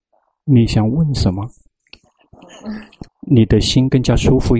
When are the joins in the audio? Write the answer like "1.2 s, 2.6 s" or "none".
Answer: 3.0 s